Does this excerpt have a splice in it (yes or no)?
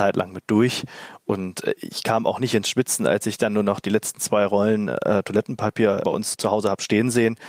no